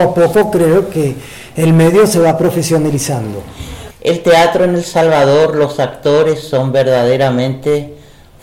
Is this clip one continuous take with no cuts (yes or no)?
no